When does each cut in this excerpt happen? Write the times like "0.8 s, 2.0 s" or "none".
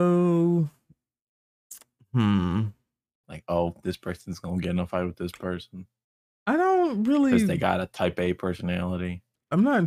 3.2 s

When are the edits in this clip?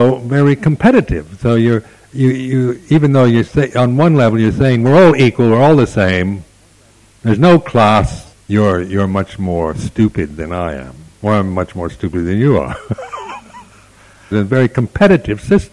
8.3 s, 14.3 s

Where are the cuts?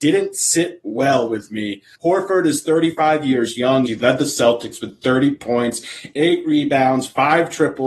1.9 s, 3.9 s

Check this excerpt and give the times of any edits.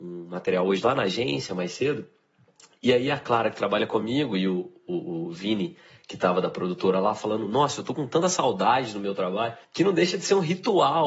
9.6 s

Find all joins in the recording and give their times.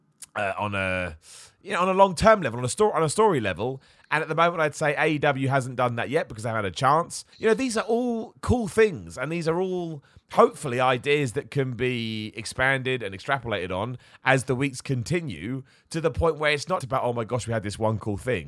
7.3 s, 16.8 s

